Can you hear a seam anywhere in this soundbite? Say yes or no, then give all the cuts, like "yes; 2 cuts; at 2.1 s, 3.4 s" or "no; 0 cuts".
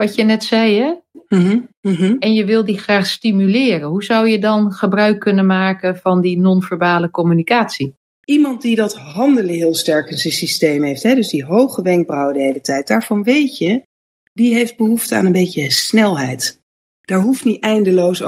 yes; 2 cuts; at 1.7 s, 8.2 s